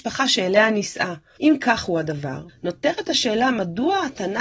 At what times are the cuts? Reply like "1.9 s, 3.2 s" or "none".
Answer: 1.4 s, 2.5 s

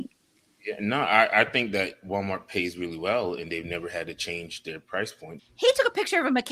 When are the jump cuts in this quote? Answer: 5.4 s

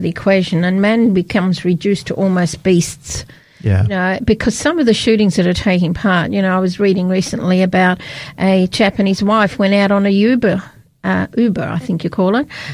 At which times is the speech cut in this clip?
none

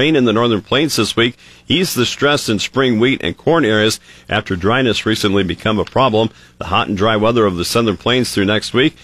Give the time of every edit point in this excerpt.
none

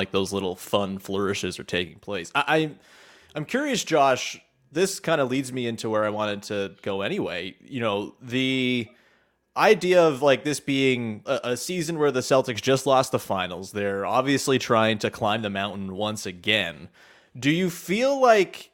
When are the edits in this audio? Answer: 11.3 s

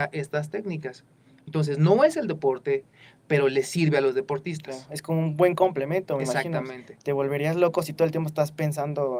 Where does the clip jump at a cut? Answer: none

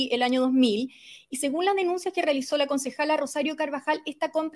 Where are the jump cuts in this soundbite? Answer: none

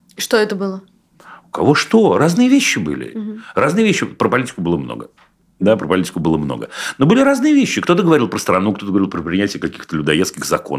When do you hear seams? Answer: none

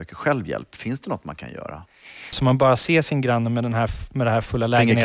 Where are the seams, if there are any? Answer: 2.3 s

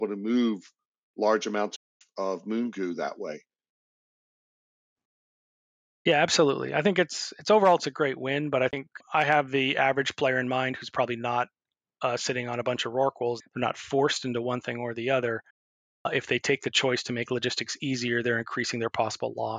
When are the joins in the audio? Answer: 13.4 s

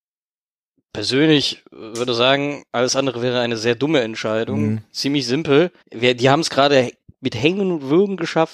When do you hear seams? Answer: 5.8 s

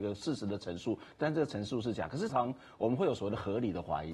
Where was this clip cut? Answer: 2.3 s

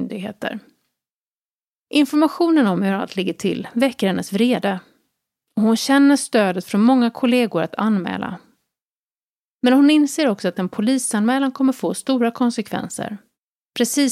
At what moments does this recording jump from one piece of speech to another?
none

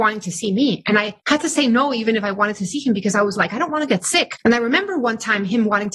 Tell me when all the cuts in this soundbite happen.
1.2 s, 4.4 s

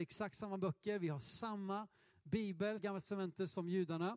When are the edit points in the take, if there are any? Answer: 2.8 s

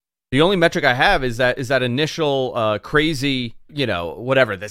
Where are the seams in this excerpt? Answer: 3.7 s

